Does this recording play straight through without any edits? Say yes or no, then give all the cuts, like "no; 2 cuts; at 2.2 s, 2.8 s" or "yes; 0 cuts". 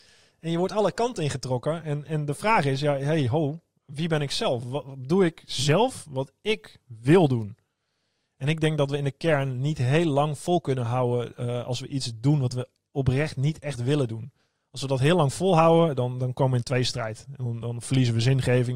yes; 0 cuts